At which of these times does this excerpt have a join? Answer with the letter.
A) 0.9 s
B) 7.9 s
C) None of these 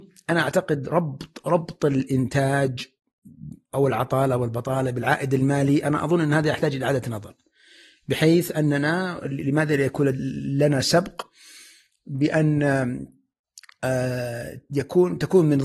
C